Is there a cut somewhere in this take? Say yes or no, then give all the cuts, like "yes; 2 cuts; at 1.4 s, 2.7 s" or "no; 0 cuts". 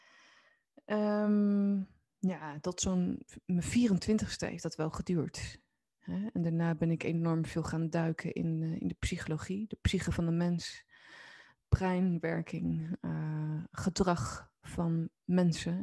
no; 0 cuts